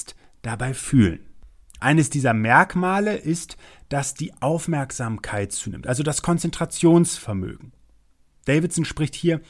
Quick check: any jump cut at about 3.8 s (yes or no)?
no